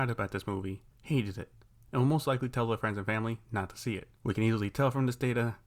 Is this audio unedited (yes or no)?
yes